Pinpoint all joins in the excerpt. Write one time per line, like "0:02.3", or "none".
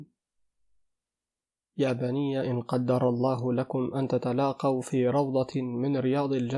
none